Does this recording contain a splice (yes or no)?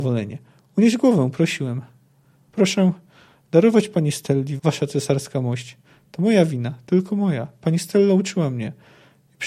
yes